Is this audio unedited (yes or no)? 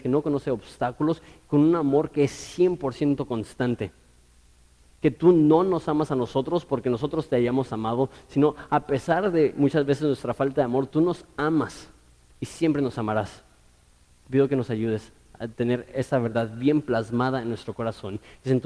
yes